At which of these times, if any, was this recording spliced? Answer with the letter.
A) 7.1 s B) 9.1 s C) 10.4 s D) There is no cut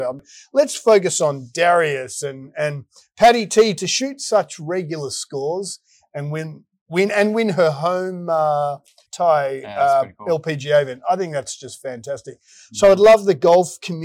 B